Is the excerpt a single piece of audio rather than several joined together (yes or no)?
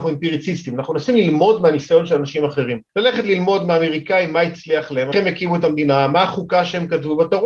no